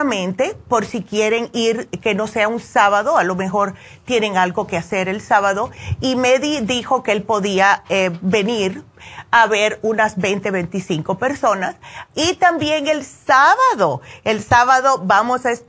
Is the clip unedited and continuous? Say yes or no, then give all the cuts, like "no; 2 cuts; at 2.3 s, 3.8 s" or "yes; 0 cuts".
no; 1 cut; at 12.1 s